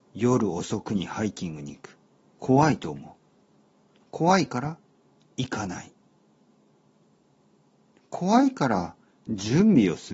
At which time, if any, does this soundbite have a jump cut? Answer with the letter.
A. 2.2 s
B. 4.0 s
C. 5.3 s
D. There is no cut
B